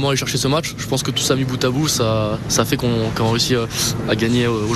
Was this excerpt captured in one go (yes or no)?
yes